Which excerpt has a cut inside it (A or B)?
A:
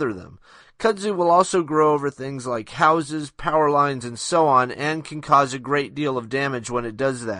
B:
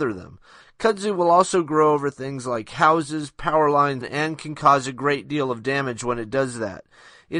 B